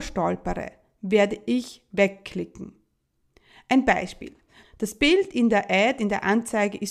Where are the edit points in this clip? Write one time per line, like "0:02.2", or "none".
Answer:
0:04.6